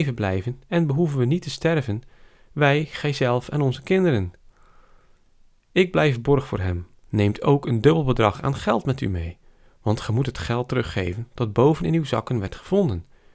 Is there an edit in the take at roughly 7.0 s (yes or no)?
yes